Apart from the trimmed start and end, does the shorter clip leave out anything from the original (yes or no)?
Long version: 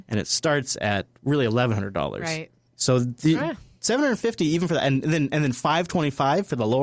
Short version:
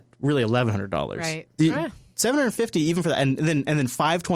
yes